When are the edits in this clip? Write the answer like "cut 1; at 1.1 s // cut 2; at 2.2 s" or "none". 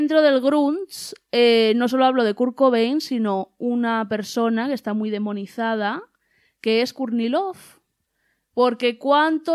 none